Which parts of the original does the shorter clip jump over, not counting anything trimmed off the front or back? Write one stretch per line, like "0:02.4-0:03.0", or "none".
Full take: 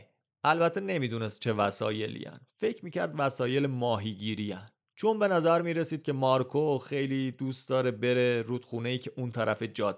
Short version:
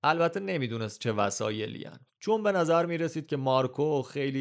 0:02.5-0:04.9